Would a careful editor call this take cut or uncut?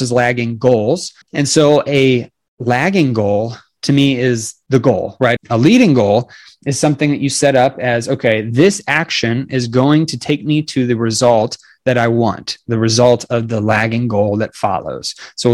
cut